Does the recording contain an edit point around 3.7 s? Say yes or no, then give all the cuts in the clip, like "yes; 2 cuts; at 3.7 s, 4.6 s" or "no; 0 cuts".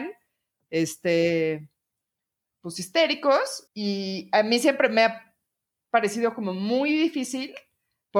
yes; 1 cut; at 3.7 s